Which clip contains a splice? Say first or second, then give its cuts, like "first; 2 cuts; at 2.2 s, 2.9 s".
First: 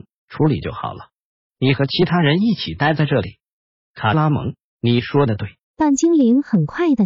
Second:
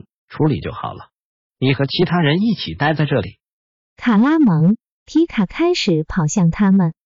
first; 2 cuts; at 3.8 s, 5.6 s